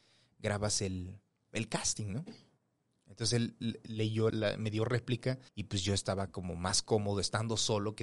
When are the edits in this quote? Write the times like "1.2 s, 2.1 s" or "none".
4.3 s, 5.5 s